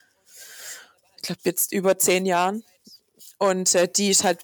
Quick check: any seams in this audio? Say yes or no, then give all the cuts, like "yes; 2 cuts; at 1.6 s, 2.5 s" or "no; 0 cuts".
no; 0 cuts